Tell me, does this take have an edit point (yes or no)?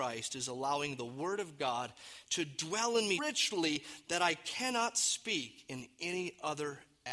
yes